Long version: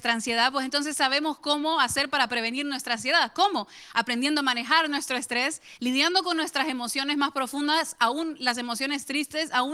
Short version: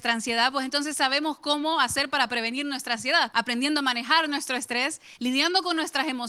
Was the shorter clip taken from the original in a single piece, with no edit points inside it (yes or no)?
no